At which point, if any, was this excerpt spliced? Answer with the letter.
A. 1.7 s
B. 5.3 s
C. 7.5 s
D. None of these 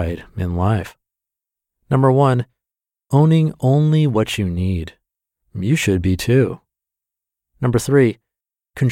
B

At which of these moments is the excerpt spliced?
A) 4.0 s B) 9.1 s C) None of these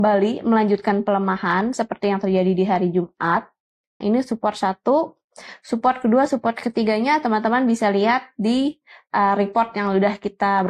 A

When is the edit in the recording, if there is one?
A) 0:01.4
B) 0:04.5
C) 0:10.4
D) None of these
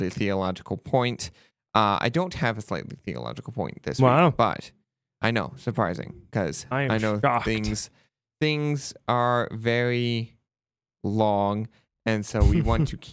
D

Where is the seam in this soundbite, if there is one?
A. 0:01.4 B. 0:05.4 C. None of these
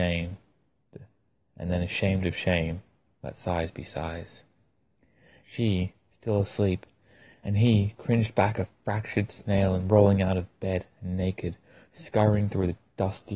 B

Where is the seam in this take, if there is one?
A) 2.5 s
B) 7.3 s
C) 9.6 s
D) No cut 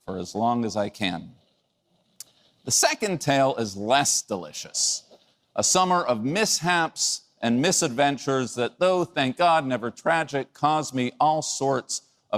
D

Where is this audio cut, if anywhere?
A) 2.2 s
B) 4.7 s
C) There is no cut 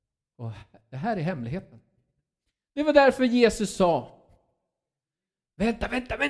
C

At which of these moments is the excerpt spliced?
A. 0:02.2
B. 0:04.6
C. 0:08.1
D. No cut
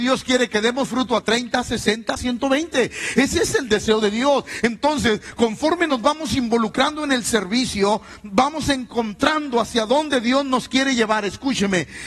A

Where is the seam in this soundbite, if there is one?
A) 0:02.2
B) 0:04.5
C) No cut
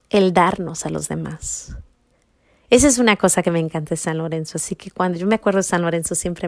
C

